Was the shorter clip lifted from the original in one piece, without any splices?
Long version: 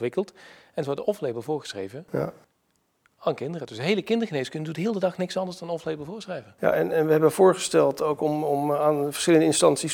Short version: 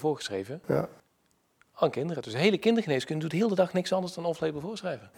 yes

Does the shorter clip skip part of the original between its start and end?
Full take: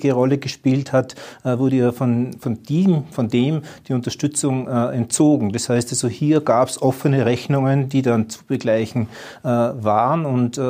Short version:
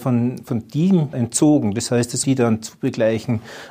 yes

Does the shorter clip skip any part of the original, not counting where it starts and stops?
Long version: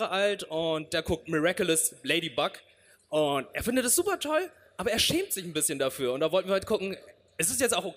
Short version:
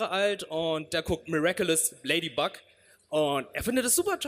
no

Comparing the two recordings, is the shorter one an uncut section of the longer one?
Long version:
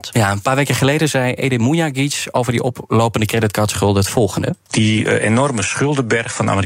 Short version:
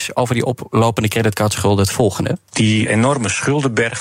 no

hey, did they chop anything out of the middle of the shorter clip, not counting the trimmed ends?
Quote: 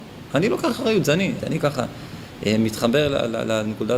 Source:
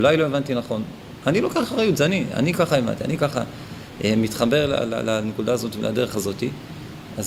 yes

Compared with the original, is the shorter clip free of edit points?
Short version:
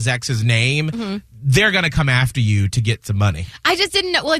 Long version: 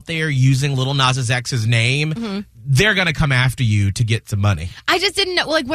yes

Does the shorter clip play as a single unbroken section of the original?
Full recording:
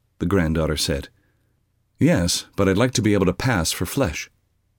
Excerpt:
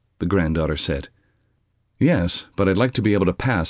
yes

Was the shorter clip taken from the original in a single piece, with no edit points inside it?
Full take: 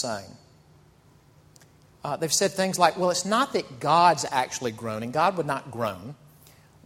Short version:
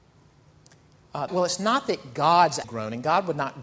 no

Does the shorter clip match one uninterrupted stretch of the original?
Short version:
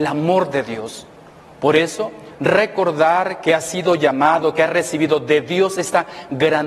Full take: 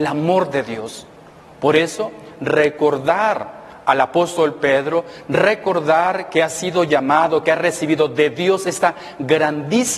no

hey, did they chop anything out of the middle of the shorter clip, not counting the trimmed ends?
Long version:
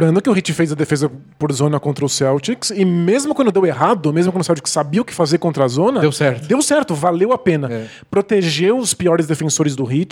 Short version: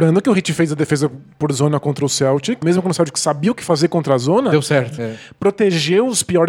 yes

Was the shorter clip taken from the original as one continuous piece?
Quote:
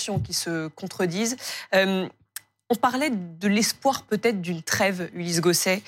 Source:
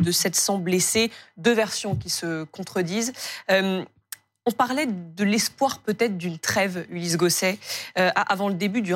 yes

